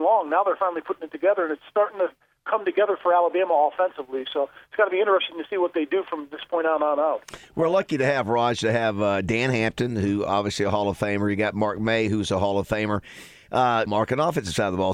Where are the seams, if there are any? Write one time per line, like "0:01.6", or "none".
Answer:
0:13.9